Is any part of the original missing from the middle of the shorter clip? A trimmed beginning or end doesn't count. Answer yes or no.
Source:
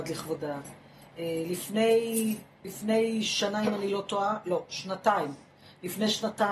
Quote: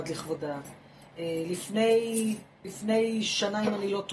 no